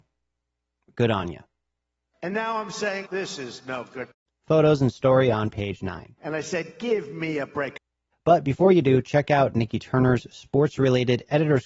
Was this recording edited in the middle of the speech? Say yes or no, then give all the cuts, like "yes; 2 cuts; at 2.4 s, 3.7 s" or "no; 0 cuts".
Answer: yes; 2 cuts; at 3.1 s, 8.1 s